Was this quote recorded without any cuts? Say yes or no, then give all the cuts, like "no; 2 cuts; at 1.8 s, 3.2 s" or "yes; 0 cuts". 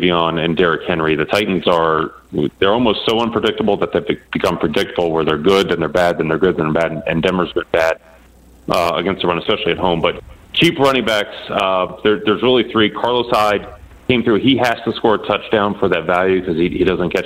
yes; 0 cuts